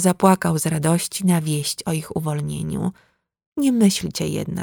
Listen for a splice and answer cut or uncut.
uncut